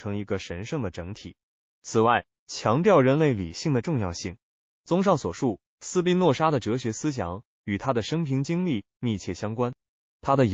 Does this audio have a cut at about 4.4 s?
no; 1 cut; at 2.3 s

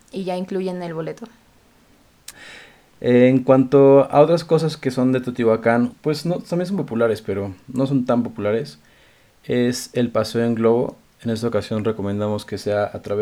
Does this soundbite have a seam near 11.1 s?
no; 2 cuts; at 2.3 s, 5.9 s

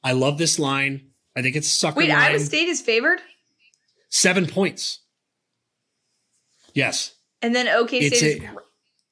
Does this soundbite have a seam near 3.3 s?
no; 0 cuts

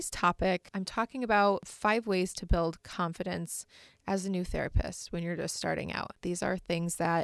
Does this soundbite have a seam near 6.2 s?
no; 0 cuts

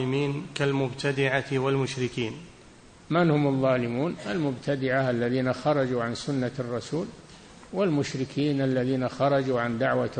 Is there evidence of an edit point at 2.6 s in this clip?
no; 0 cuts

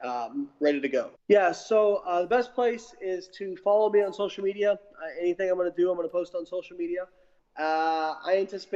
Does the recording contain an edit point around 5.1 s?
no; 2 cuts; at 1.1 s, 7.4 s

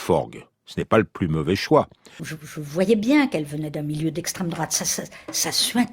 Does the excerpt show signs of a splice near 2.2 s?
yes; 1 cut; at 2.2 s

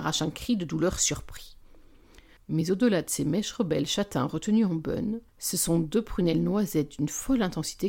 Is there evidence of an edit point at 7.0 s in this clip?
no; 2 cuts; at 2.4 s, 5.3 s

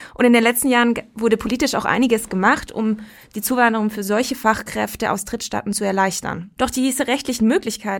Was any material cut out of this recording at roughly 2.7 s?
no; 1 cut; at 6.6 s

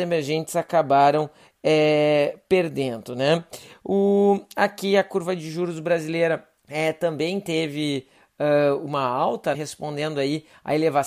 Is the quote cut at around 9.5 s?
yes; 2 cuts; at 6.6 s, 9.5 s

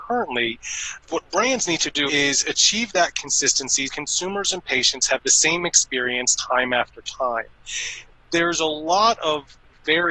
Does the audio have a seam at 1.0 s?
yes; 3 cuts; at 1.0 s, 2.1 s, 3.8 s

